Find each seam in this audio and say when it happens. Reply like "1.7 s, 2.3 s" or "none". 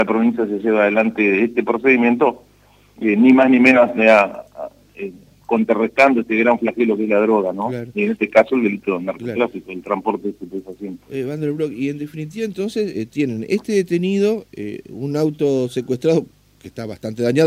none